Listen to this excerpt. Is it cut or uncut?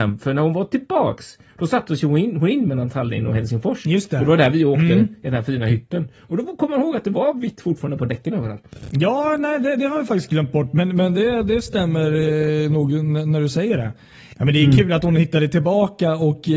uncut